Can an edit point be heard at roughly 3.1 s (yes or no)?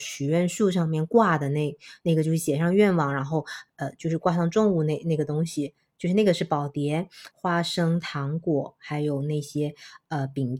no